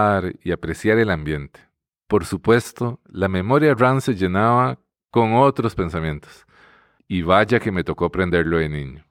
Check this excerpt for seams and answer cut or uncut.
cut